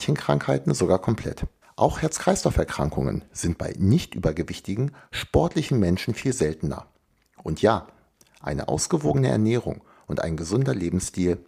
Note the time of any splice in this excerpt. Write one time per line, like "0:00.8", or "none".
0:01.6